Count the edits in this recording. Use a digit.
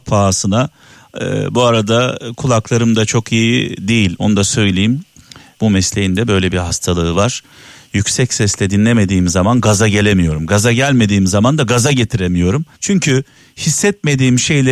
2